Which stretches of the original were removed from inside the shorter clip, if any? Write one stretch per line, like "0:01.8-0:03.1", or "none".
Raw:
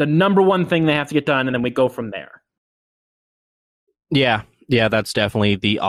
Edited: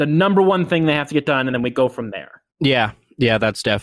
0:02.5-0:04.0